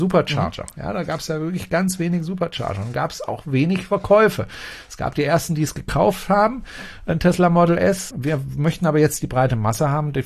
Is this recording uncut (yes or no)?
no